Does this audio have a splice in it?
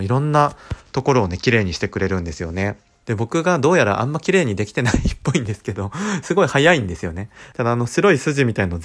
yes; 2 cuts; at 3.0 s, 7.5 s

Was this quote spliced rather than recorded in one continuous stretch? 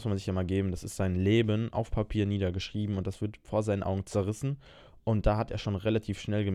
no; 0 cuts

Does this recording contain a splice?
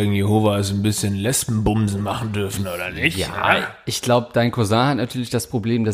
no; 0 cuts

